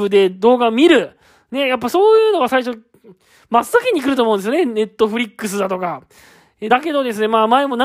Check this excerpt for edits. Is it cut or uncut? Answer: uncut